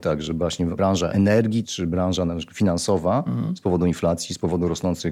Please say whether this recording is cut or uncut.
uncut